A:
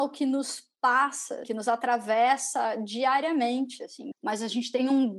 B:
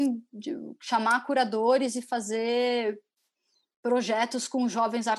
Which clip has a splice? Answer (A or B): A